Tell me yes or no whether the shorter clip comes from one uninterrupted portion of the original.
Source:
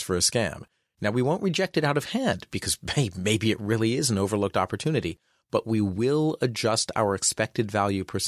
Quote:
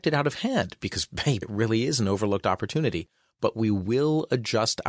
no